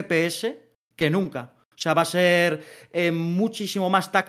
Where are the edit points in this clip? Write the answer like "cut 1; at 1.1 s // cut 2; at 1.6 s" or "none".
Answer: none